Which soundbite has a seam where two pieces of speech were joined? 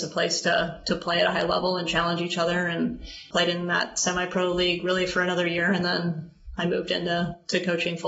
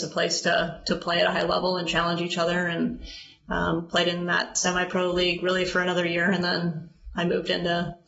first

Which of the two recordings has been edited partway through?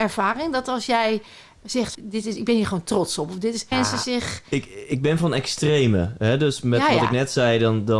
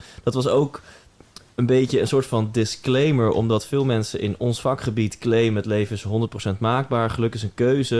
first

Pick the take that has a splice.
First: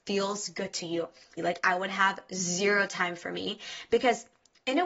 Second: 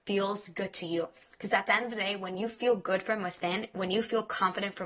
first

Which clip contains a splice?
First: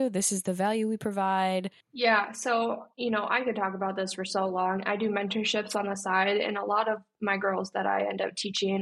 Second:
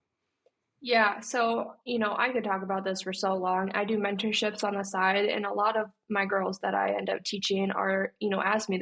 first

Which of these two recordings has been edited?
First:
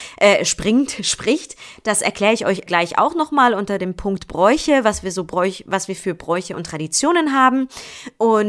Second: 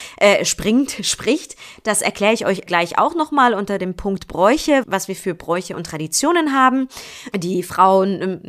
second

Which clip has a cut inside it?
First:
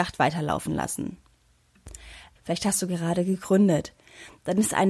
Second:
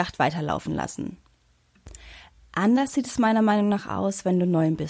first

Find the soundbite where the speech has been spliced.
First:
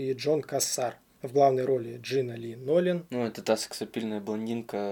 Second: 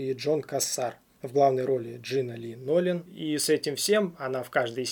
second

